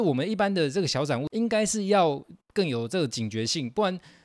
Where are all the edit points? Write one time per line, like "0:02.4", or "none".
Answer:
none